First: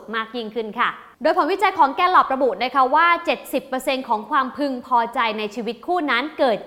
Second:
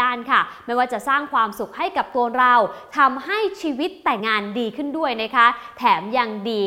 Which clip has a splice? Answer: second; 1 cut; at 4.2 s

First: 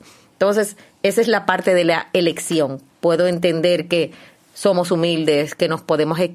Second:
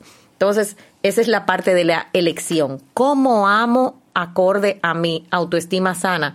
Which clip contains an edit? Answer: first; 1 cut; at 2.9 s

